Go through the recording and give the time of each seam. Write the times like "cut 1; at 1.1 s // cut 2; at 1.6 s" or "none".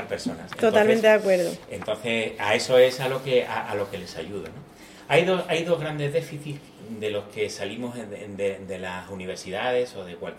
none